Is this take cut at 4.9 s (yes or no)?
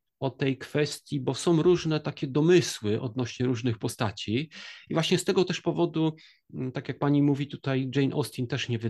yes